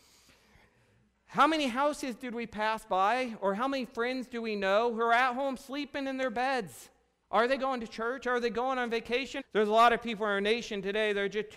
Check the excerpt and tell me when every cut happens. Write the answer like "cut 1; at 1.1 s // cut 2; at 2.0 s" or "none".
cut 1; at 7.2 s // cut 2; at 9.4 s